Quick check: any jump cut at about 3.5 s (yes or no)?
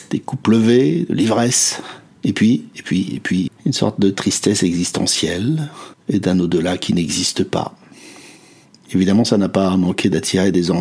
yes